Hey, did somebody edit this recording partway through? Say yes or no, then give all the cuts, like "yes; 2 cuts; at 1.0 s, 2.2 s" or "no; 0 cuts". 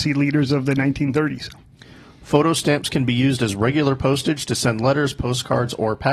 no; 0 cuts